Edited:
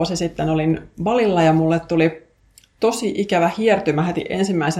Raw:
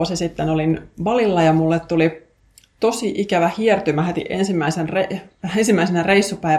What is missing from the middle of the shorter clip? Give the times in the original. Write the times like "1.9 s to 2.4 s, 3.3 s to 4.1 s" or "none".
none